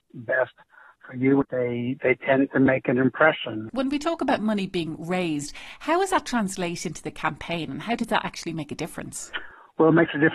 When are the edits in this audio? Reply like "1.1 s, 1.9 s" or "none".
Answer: 1.4 s, 3.7 s